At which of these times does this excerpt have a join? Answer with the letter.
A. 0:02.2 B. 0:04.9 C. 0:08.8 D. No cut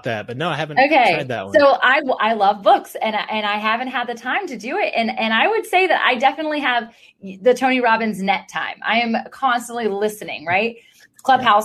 A